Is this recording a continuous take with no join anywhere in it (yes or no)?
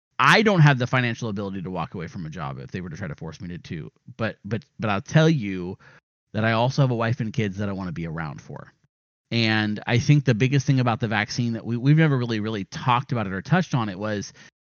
yes